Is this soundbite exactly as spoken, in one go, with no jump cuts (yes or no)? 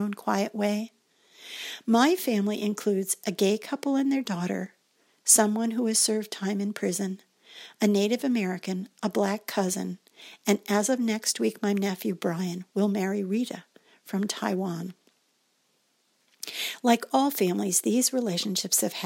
yes